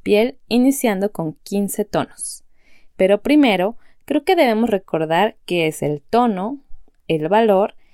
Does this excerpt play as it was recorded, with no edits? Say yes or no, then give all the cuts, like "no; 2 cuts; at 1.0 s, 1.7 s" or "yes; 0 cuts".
no; 1 cut; at 2.9 s